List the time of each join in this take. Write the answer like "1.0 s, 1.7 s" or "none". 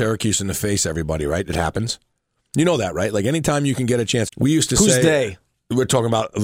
4.3 s